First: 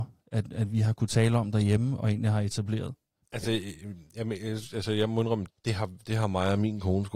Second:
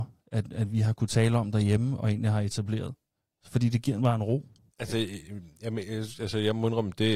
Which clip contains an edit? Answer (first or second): first